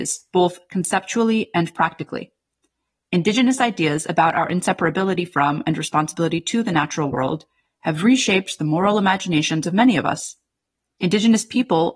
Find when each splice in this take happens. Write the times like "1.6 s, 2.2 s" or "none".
none